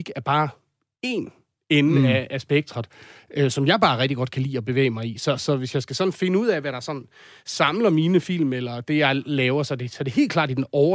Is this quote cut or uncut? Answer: uncut